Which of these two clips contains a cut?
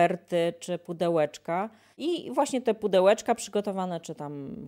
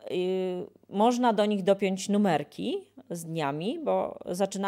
first; 1 cut; at 1.9 s

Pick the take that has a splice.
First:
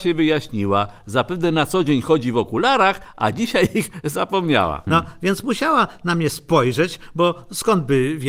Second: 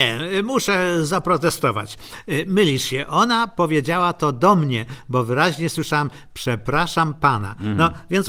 first; 1 cut; at 4.9 s

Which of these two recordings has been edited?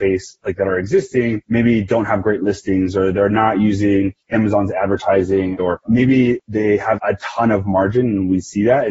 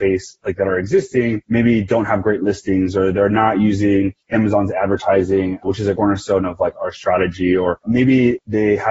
first; 2 cuts; at 5.6 s, 7.0 s

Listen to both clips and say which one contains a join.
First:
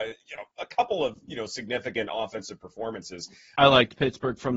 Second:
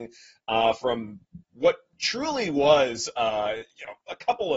first; 1 cut; at 3.5 s

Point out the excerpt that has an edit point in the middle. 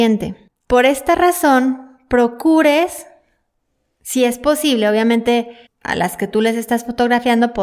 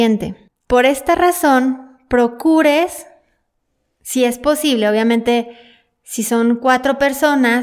first; 1 cut; at 5.7 s

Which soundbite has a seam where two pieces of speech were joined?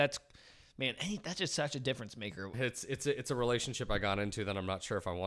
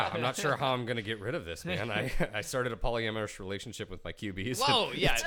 first; 1 cut; at 2.5 s

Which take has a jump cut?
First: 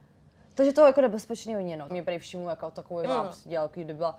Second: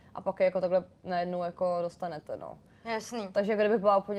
first; 2 cuts; at 1.9 s, 3.0 s

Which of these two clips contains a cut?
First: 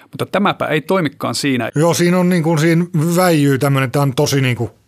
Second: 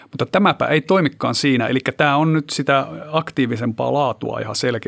first; 1 cut; at 1.7 s

